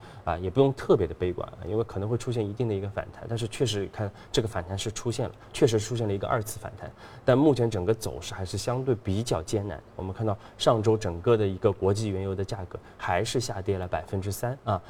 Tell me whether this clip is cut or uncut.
uncut